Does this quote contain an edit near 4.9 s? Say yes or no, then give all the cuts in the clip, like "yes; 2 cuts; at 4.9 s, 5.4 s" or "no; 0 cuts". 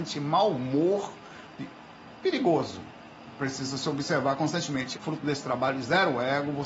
yes; 1 cut; at 4.9 s